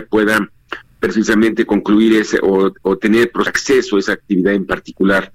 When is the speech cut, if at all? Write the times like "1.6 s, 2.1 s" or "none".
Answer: 3.5 s